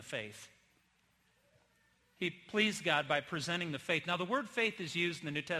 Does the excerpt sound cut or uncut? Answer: uncut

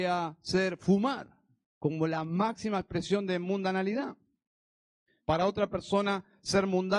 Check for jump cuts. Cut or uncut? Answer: cut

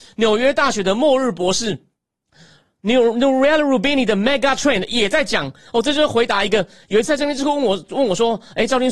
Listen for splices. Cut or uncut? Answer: uncut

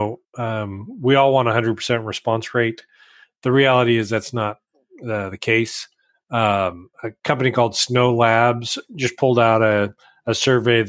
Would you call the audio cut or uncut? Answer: cut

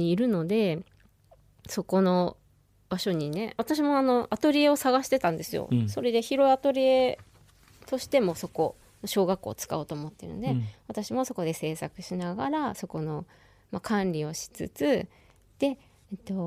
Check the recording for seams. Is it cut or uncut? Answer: uncut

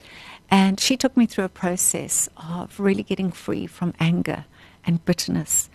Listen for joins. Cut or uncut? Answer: uncut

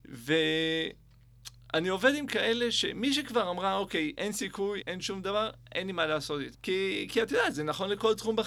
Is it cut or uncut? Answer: cut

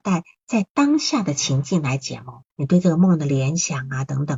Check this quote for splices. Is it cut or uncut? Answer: cut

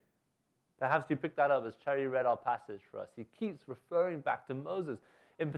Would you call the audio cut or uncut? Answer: uncut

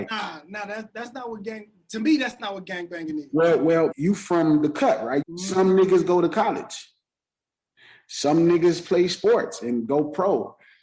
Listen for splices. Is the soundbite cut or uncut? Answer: cut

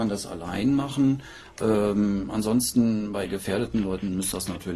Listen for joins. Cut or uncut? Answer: uncut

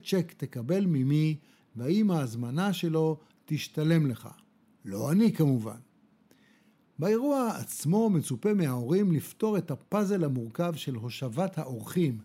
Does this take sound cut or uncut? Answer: uncut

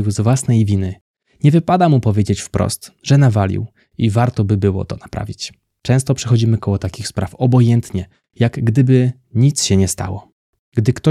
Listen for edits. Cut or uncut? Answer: uncut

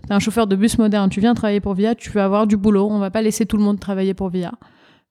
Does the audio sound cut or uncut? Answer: uncut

